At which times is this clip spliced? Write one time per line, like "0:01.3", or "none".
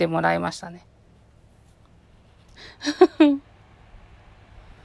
0:02.5